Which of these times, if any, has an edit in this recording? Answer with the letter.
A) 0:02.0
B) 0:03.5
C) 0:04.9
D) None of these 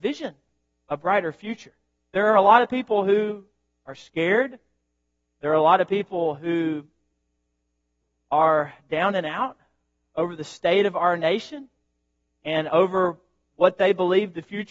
A